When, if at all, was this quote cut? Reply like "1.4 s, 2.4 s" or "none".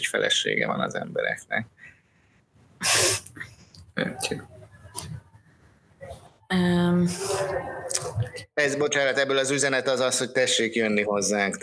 none